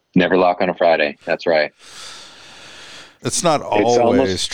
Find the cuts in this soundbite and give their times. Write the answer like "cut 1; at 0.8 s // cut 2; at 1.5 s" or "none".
cut 1; at 3.2 s